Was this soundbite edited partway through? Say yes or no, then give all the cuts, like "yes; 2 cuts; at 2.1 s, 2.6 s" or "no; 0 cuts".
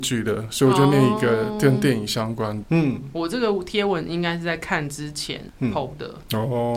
yes; 1 cut; at 2.6 s